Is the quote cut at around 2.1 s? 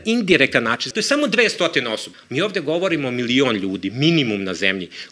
yes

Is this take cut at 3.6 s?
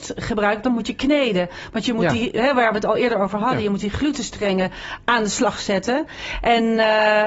no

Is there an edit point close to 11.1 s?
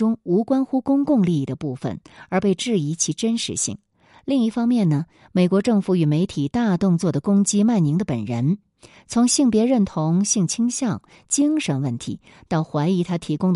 no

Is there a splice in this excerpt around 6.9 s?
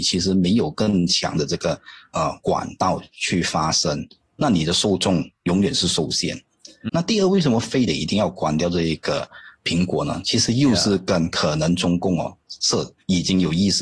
yes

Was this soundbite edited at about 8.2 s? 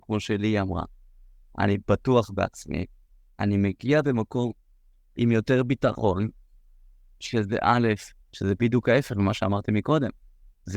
yes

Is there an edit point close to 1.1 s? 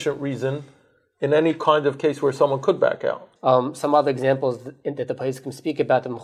no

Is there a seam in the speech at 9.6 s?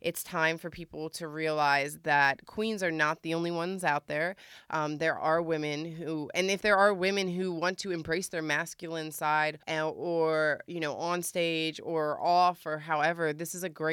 yes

